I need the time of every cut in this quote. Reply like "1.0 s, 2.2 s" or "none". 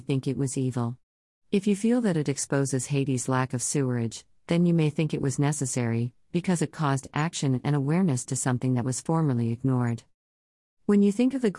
none